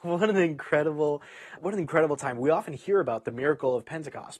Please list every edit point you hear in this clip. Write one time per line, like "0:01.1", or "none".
0:01.6